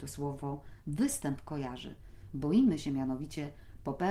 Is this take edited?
no; 0 cuts

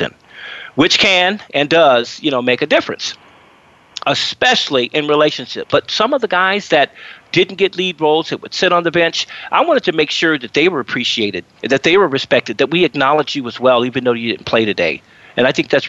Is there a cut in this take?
yes; 2 cuts; at 5.7 s, 11.6 s

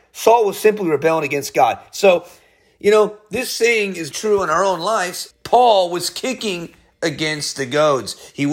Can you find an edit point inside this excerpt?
yes; 2 cuts; at 4.1 s, 5.3 s

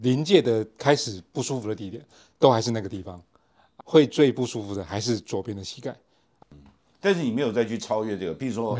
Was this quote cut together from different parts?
yes; 2 cuts; at 3.8 s, 6.4 s

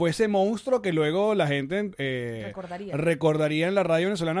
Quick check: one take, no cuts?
no; 1 cut; at 1.9 s

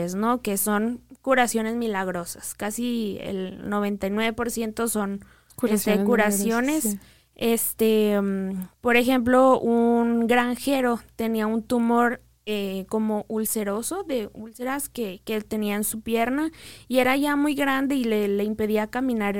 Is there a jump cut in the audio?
no; 0 cuts

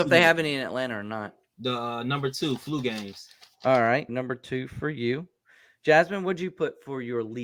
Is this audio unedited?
no; 2 cuts; at 1.5 s, 4.1 s

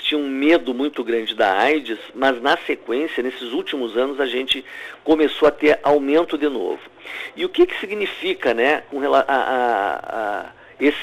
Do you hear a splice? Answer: no; 0 cuts

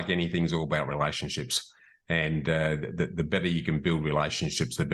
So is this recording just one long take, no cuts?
yes; 0 cuts

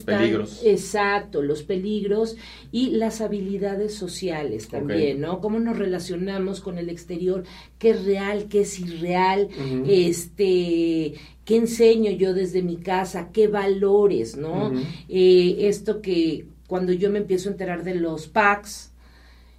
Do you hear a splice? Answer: no; 0 cuts

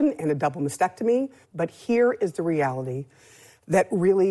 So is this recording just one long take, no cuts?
no; 1 cut; at 1.4 s

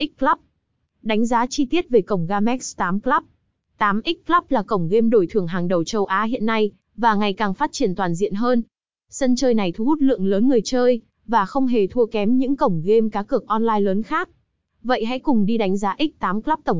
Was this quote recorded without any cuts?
yes; 0 cuts

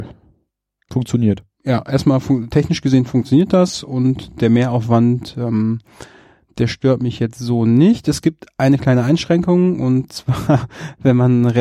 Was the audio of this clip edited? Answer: no; 0 cuts

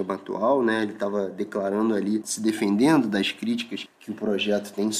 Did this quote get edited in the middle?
yes; 2 cuts; at 2.2 s, 3.9 s

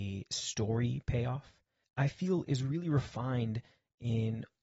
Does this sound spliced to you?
yes; 1 cut; at 1.8 s

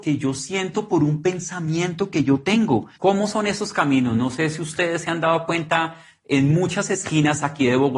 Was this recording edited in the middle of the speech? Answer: yes; 1 cut; at 3.0 s

